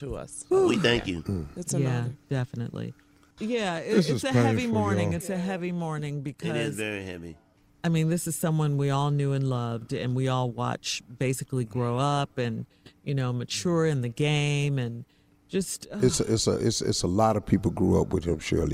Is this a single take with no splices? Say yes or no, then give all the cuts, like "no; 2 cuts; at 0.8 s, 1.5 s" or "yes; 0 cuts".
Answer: yes; 0 cuts